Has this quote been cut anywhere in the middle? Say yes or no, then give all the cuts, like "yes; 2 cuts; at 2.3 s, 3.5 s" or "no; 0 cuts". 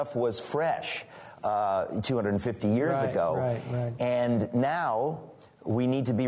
no; 0 cuts